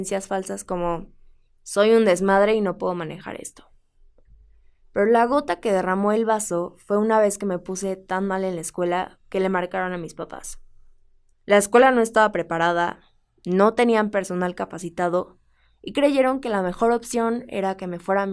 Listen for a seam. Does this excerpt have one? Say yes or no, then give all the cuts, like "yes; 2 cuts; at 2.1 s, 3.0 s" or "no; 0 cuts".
no; 0 cuts